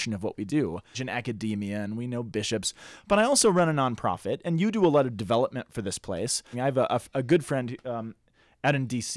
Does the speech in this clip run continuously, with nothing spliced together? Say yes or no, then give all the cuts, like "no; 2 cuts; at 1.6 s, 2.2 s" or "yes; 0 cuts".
no; 2 cuts; at 0.9 s, 6.5 s